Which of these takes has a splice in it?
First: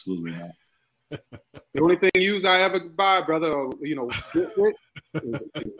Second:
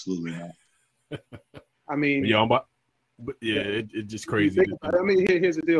second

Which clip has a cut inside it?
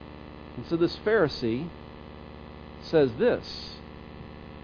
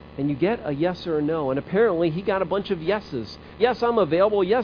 second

